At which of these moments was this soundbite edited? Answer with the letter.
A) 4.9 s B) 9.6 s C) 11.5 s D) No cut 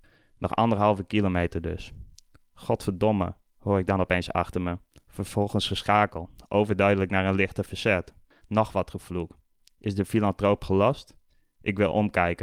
D